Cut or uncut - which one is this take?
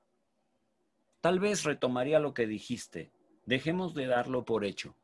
uncut